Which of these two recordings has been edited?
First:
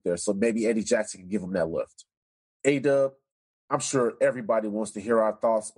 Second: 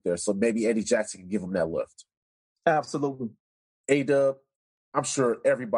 first; 1 cut; at 2.4 s

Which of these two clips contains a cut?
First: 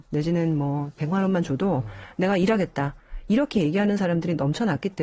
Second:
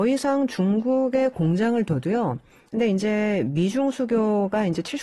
second; 1 cut; at 2.7 s

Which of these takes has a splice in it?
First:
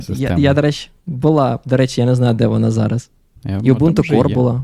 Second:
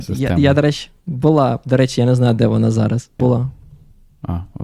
second; 1 cut; at 3.2 s

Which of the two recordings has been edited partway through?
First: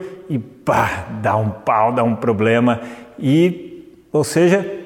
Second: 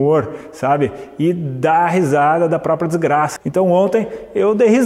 second; 1 cut; at 3.4 s

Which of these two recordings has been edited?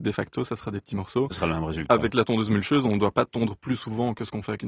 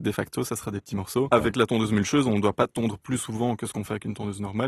second; 1 cut; at 1.3 s

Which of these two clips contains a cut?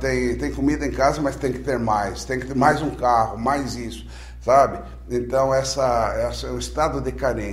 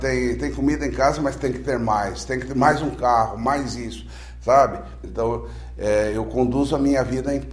second; 1 cut; at 5.0 s

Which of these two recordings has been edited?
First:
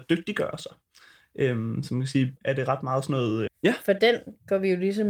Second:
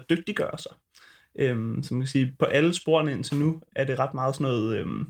first; 2 cuts; at 2.4 s, 3.5 s

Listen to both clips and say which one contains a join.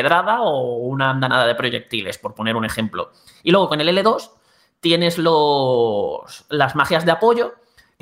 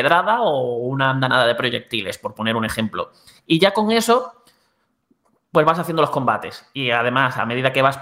second; 1 cut; at 3.4 s

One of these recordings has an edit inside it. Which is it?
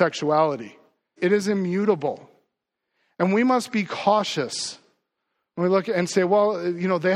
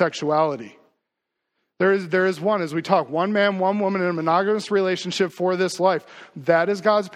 first; 1 cut; at 1.2 s

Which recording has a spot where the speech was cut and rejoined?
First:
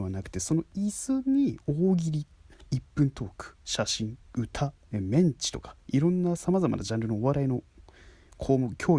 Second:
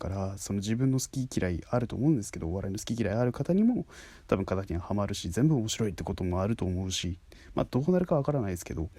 first; 1 cut; at 4.8 s

